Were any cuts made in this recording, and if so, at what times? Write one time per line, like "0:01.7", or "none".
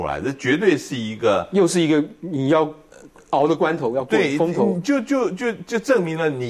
none